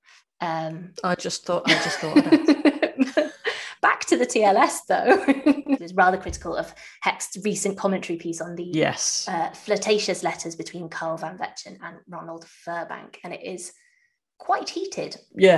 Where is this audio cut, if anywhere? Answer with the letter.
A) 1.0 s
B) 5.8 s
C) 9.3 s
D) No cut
B